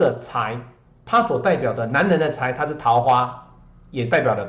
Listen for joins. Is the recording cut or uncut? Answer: uncut